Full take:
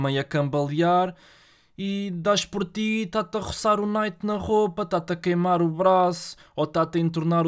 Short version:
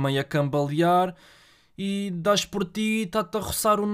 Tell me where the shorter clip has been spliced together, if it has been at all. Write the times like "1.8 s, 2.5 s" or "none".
none